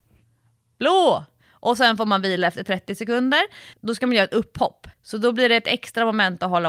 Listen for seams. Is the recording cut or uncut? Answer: cut